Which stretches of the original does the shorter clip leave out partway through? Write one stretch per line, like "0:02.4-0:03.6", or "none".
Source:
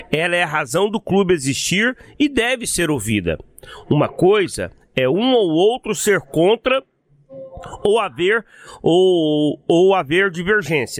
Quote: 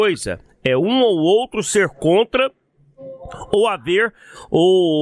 none

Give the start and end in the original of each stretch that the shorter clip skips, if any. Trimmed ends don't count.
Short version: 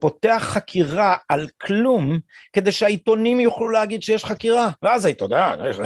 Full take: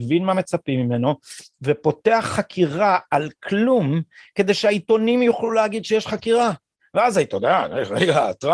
0:06.6-0:06.9

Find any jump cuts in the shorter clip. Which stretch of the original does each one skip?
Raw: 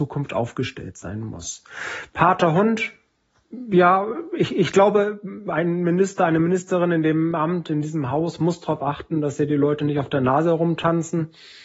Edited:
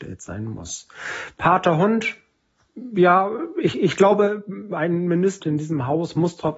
0:06.2-0:07.6

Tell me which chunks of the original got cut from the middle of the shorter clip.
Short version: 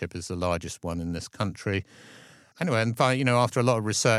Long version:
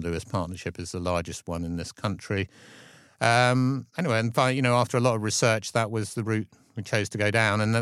0:03.2-0:03.9

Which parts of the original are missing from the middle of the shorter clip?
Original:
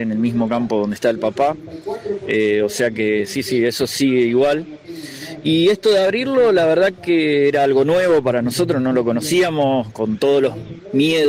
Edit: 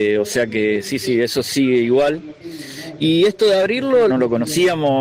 0:06.5-0:08.8

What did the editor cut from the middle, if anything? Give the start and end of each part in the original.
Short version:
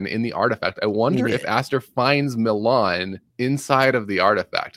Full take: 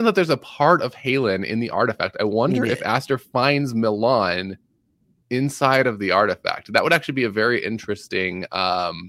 0:04.7-0:05.2

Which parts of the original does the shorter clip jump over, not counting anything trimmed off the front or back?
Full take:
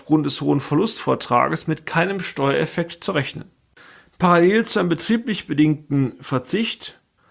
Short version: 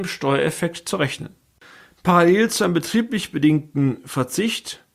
none

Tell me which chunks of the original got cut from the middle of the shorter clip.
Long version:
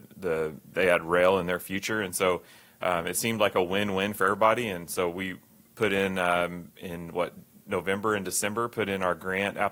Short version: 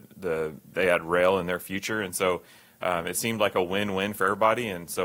none

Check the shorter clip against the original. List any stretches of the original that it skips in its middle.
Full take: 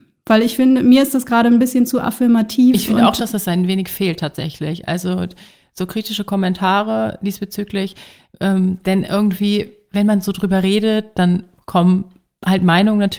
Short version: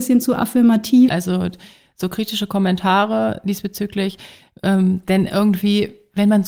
0:02.7-0:04.8

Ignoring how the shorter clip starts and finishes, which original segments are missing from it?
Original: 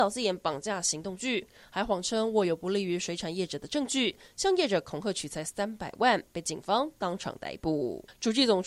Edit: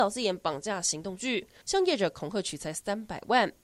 0:01.6-0:04.3

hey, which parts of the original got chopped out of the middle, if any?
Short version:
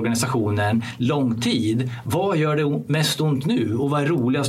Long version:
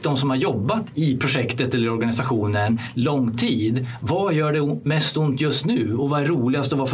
0:05.4-0:05.6

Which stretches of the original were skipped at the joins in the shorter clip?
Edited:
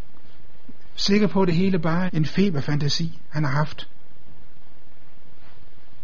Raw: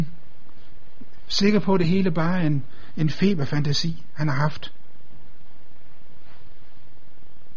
0:02.4-0:02.9

